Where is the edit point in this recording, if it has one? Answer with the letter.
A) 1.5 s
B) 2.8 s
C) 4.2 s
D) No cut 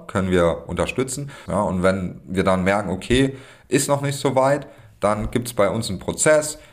A